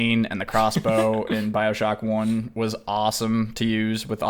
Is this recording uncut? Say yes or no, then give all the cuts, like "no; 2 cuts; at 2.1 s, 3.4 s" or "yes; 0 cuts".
yes; 0 cuts